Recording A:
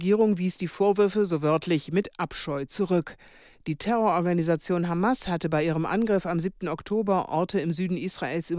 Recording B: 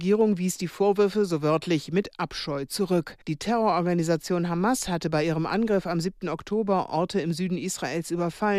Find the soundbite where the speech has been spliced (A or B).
B